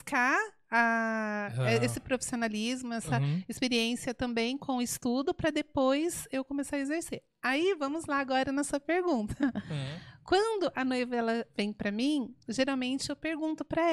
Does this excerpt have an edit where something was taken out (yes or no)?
no